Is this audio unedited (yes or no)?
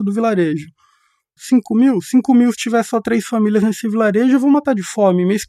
no